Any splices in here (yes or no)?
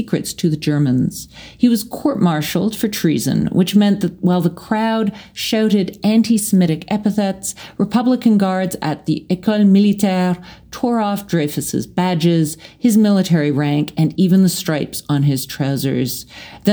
no